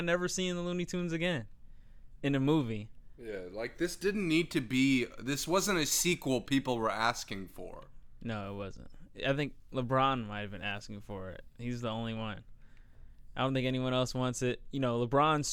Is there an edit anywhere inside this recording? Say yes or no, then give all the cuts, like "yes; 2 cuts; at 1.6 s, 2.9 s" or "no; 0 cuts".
no; 0 cuts